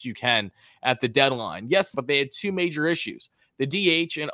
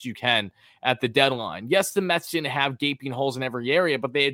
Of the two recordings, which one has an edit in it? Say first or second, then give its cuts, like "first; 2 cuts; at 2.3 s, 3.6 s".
first; 1 cut; at 1.9 s